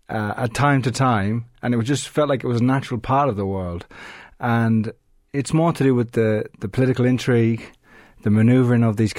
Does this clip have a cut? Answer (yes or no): no